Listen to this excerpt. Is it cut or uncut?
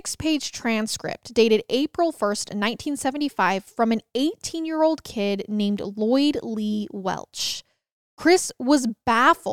uncut